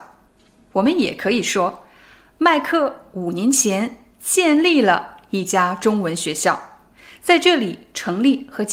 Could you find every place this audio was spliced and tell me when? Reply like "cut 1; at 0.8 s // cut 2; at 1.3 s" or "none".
none